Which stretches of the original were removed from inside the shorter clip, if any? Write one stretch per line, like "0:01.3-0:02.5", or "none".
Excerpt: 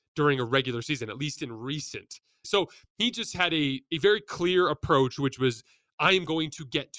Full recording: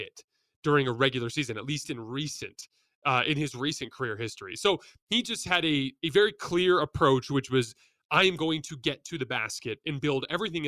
0:02.9-0:04.6